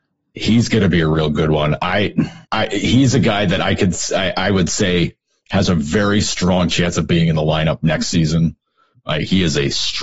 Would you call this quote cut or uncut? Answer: cut